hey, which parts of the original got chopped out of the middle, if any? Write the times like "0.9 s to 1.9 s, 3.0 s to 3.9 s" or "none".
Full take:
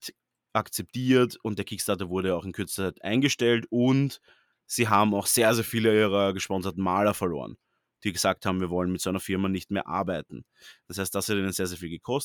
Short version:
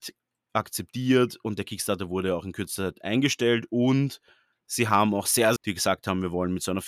5.6 s to 7.9 s